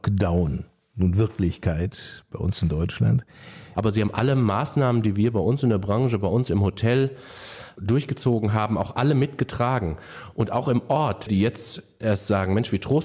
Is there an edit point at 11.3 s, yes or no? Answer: yes